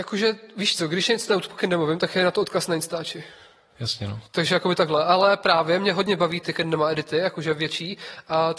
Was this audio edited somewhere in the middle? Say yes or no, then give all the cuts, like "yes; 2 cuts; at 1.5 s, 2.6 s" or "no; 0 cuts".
yes; 1 cut; at 6.4 s